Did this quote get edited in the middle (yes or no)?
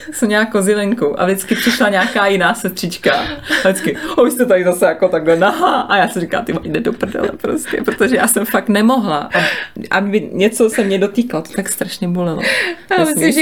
no